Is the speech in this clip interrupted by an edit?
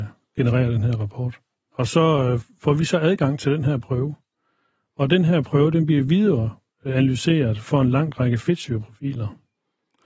yes; 1 cut; at 1.7 s

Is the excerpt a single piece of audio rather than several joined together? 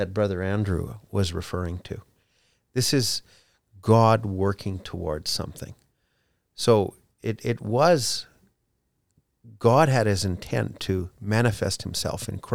yes; 0 cuts

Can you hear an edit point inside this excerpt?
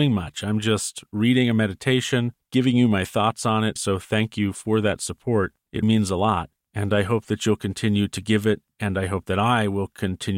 yes; 2 cuts; at 3.8 s, 5.8 s

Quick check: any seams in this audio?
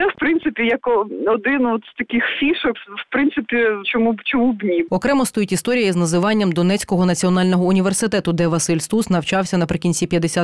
yes; 2 cuts; at 2.7 s, 3.8 s

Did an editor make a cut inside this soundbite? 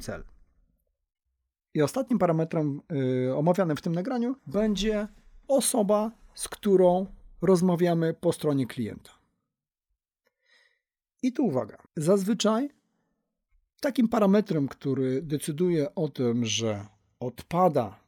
yes; 3 cuts; at 1.5 s, 4.4 s, 11.9 s

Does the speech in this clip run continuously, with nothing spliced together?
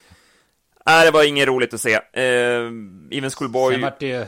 yes; 0 cuts

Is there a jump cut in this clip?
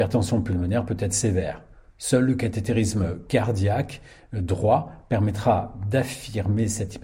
no; 0 cuts

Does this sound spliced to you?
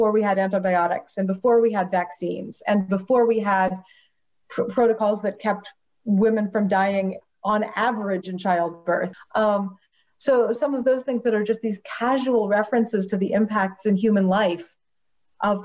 yes; 2 cuts; at 9.1 s, 10.6 s

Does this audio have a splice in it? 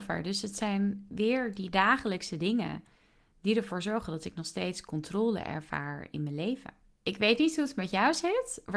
yes; 1 cut; at 6.9 s

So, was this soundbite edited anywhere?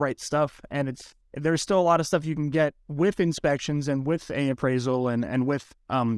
no; 0 cuts

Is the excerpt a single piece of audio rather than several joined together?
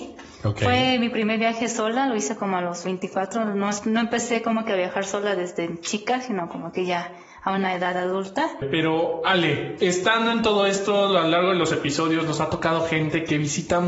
no; 1 cut; at 8.6 s

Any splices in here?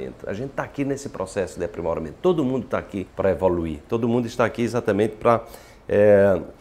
yes; 1 cut; at 3.1 s

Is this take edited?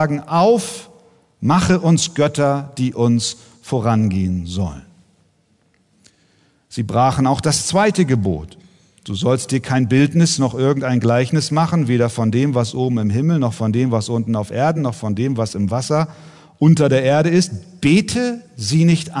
no; 0 cuts

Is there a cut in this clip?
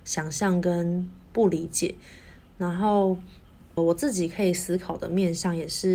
no; 0 cuts

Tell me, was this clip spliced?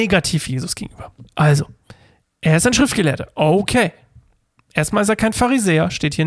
yes; 1 cut; at 1.3 s

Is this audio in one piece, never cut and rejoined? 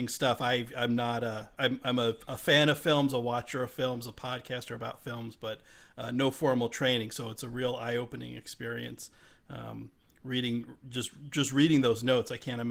yes; 0 cuts

